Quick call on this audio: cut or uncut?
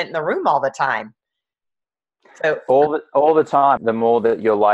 cut